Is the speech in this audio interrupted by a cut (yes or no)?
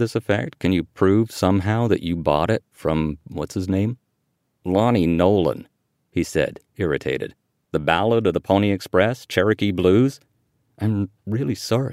yes